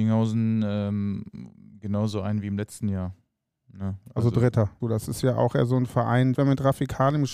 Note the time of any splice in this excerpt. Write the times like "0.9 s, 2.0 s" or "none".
4.8 s, 6.3 s